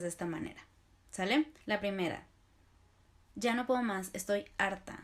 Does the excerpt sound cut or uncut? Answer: cut